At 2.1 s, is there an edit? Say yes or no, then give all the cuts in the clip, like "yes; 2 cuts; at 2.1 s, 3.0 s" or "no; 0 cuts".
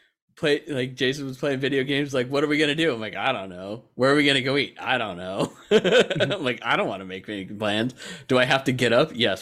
no; 0 cuts